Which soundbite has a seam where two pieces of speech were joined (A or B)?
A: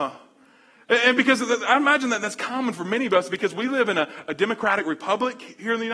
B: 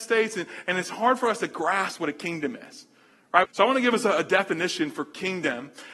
B